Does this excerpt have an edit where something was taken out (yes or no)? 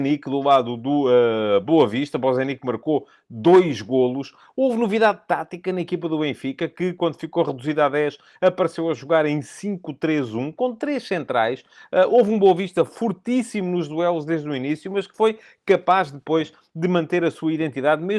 no